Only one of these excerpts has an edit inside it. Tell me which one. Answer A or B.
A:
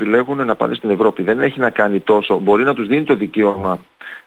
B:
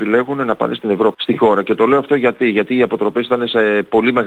B